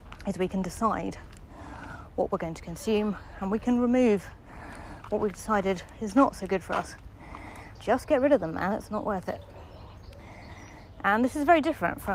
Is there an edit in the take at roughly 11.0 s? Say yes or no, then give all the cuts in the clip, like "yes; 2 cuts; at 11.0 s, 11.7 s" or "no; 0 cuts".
no; 1 cut; at 7.7 s